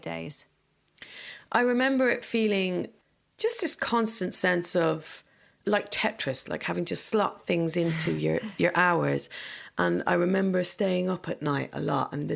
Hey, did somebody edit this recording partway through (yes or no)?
no